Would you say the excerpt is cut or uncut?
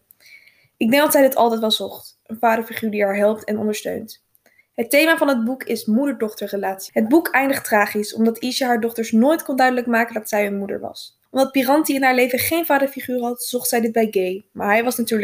cut